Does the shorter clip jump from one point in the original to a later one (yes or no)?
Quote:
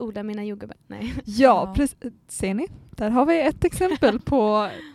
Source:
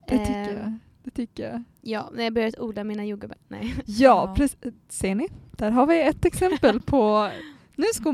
no